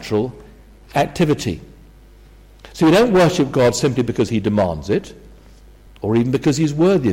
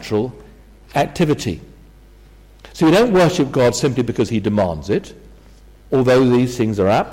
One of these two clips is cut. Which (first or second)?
second